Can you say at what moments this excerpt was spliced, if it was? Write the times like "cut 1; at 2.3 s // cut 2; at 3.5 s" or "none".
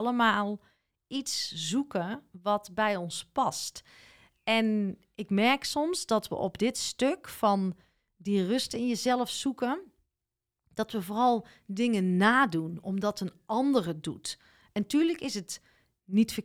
none